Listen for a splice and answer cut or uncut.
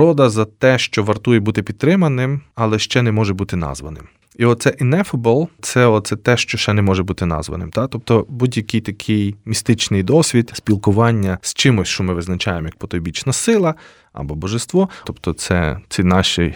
cut